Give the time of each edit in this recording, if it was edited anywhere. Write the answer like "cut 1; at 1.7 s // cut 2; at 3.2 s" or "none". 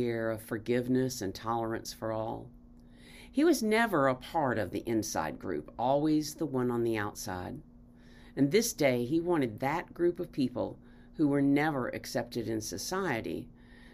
none